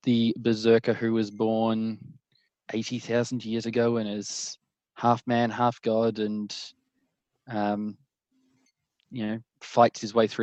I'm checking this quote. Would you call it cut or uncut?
uncut